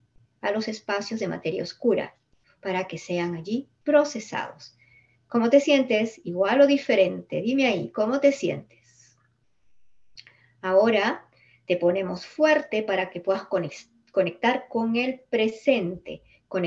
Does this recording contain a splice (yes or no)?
no